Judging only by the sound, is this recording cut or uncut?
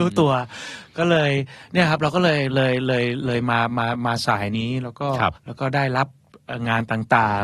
cut